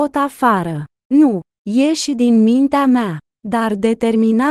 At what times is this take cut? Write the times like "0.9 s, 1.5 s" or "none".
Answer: none